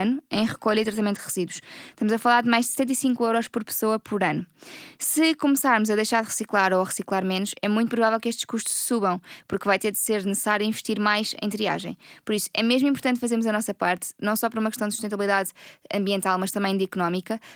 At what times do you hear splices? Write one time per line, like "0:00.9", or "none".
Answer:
none